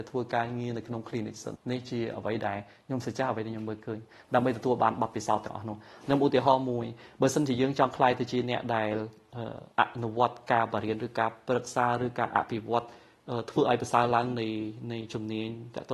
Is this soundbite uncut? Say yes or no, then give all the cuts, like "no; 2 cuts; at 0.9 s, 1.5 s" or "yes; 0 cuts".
no; 2 cuts; at 1.6 s, 9.7 s